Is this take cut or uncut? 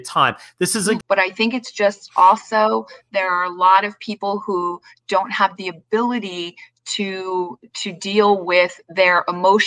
cut